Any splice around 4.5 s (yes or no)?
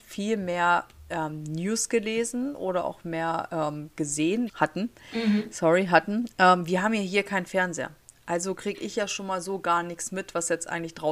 yes